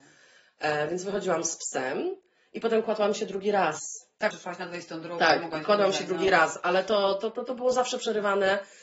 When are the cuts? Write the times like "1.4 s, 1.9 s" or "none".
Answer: 4.3 s